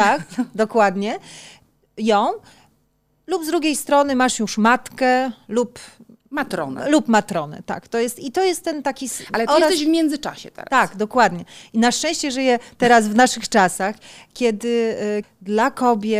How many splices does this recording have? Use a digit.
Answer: 1